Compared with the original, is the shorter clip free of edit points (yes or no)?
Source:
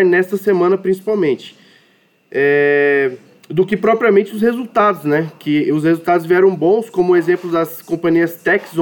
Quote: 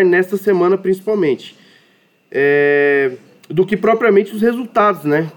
yes